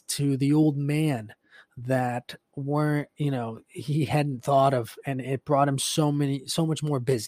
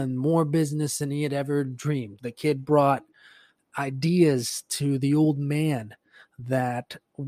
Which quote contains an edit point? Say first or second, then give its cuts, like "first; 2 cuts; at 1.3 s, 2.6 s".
second; 1 cut; at 2.2 s